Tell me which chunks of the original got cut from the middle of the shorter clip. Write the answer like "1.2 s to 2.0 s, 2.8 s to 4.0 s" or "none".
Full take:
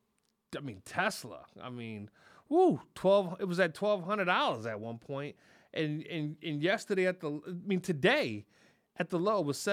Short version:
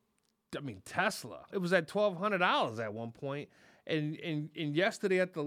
1.5 s to 3.4 s